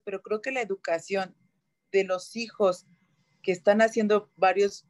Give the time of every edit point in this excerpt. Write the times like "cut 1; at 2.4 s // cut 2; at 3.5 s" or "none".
none